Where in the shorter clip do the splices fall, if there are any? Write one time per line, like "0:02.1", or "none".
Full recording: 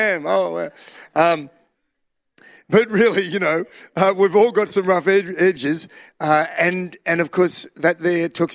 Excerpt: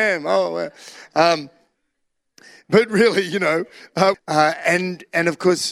0:04.1

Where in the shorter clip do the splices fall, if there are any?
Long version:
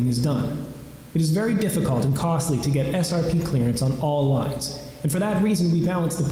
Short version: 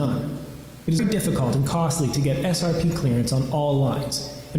0:01.0

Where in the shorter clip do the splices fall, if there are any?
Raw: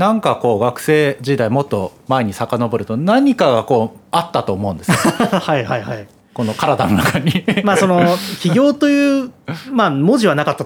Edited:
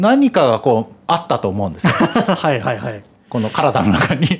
none

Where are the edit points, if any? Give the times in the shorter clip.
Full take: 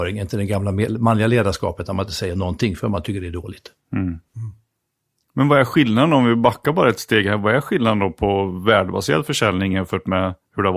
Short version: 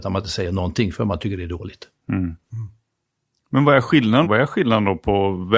0:04.2

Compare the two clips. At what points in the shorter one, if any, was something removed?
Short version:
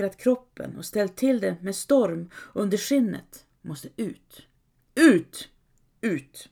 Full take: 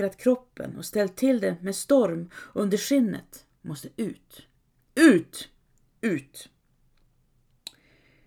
none

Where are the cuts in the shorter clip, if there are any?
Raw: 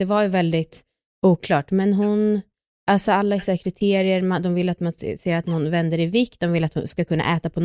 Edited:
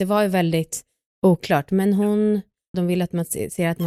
0:02.7

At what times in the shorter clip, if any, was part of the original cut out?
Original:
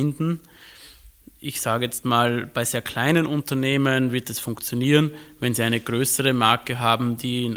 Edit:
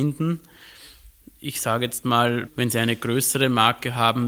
0:02.5

